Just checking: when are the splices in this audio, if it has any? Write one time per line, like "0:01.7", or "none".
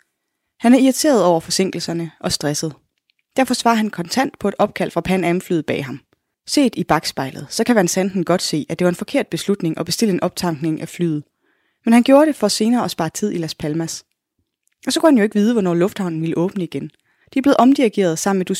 0:06.3
0:17.2

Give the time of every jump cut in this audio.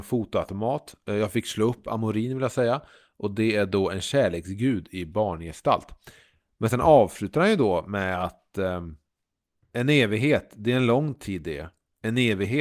none

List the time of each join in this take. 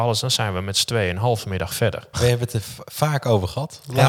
0:02.1

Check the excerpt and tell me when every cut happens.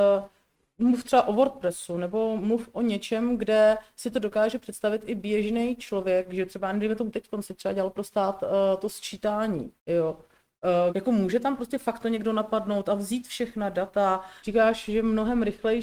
0:09.8
0:10.9
0:14.4

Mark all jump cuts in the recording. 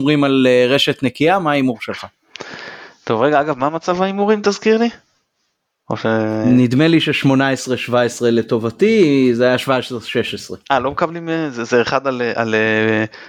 none

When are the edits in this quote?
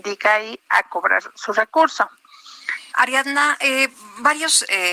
0:01.2
0:02.9

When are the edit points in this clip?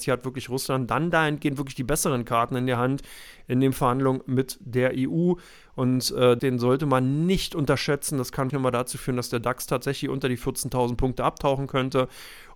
0:06.4
0:08.5

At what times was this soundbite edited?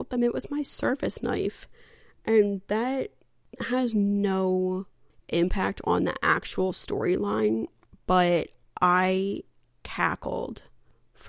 none

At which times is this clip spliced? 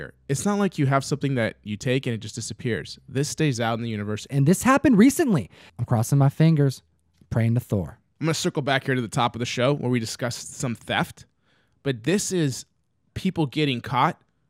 0:04.3
0:05.7
0:08.1

